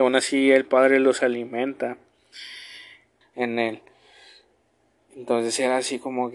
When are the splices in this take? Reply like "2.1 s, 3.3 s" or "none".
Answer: 3.2 s